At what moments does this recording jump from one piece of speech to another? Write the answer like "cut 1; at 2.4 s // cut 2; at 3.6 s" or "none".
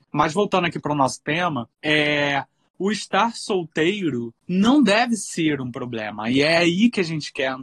none